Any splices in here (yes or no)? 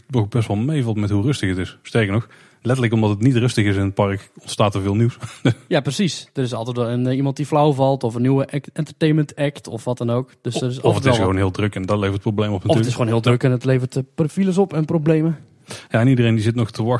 no